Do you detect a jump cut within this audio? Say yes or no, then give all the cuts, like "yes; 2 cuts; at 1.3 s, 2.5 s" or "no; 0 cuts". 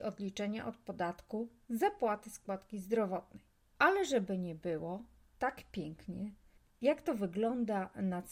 yes; 1 cut; at 3.7 s